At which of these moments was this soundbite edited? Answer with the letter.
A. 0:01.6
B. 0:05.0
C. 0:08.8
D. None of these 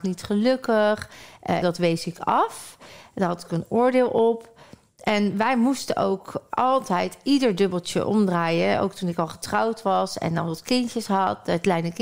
A